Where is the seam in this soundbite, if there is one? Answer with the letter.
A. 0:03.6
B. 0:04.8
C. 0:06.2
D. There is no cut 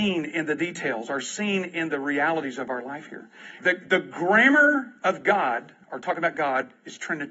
A